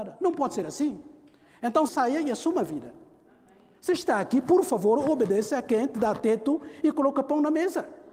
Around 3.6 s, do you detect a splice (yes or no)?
no